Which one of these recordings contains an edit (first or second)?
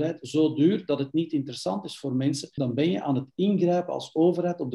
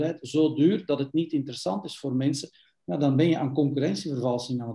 first